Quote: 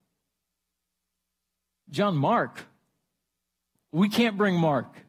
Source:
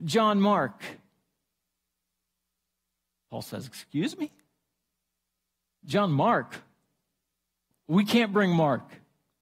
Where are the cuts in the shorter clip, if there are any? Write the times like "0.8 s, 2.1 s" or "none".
1.8 s